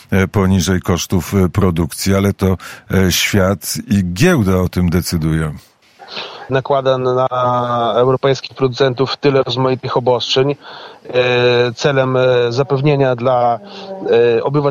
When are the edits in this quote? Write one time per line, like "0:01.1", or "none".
0:06.5